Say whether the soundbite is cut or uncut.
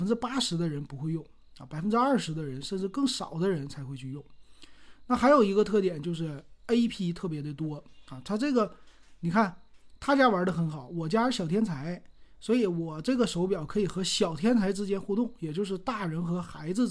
cut